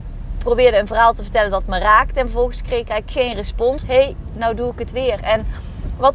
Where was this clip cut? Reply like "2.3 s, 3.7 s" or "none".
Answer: 3.8 s